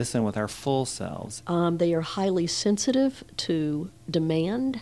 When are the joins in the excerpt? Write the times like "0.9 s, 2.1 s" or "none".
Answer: 1.4 s